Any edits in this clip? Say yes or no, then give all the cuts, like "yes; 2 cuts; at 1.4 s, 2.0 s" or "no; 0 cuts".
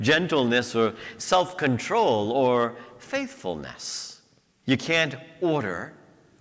yes; 1 cut; at 4.6 s